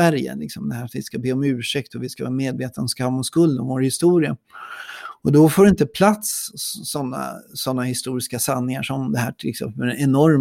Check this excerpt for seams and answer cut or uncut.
uncut